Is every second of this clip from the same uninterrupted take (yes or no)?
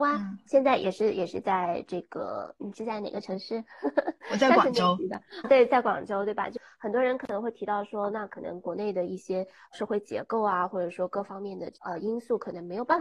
yes